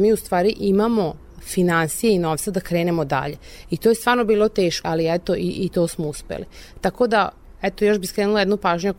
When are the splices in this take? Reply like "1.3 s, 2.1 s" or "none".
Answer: 4.8 s